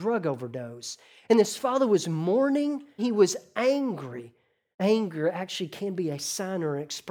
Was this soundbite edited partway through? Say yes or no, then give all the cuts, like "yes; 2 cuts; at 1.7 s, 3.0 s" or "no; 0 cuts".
yes; 2 cuts; at 3.0 s, 4.7 s